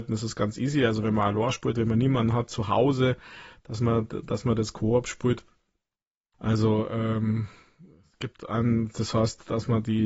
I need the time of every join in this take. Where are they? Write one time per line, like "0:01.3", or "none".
0:06.3